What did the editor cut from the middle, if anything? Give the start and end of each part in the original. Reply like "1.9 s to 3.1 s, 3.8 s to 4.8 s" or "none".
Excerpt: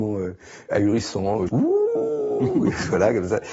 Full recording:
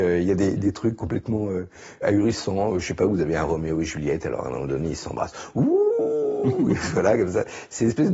2.8 s to 5.5 s